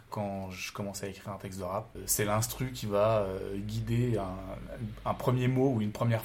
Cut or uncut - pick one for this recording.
uncut